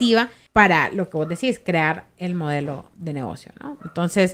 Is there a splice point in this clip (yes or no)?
no